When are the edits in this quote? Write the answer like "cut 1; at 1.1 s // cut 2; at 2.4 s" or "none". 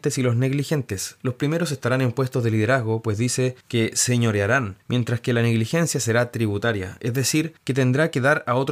none